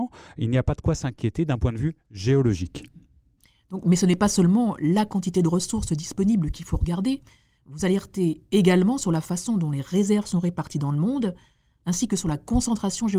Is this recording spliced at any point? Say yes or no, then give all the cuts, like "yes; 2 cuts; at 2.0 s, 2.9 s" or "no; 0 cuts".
no; 0 cuts